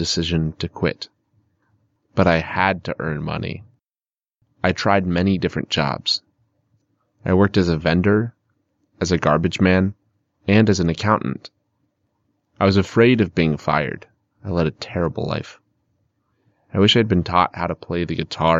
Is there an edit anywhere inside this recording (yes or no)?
no